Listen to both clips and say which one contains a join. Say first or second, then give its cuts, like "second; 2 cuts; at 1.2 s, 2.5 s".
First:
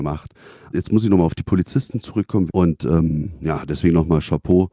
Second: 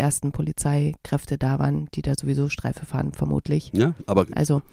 first; 1 cut; at 2.5 s